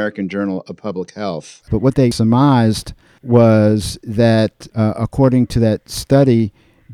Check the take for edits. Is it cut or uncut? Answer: uncut